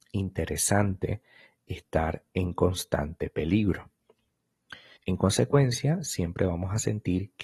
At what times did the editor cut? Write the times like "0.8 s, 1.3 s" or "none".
5.0 s

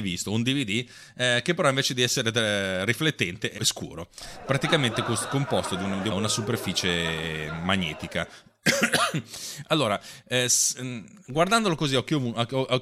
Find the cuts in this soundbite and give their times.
3.6 s, 6.1 s

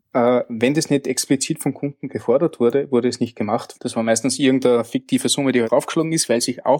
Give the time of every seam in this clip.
3.8 s, 5.6 s

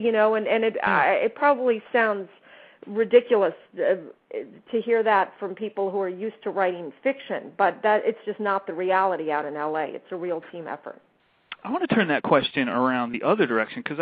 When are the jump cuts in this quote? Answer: none

